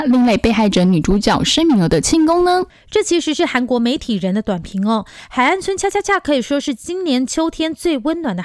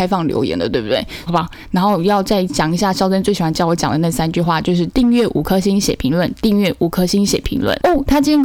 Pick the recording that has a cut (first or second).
second